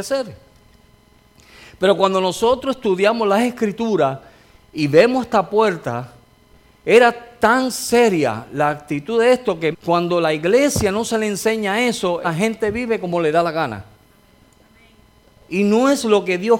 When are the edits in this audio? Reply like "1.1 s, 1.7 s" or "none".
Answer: 9.7 s, 12.2 s